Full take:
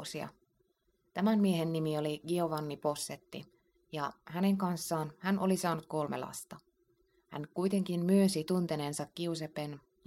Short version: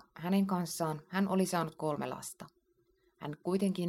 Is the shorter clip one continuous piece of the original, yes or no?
yes